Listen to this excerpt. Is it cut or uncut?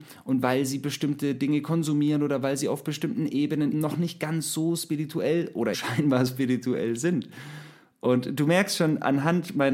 cut